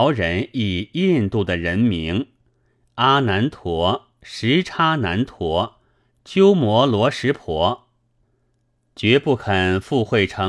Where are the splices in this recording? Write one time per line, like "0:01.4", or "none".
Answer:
none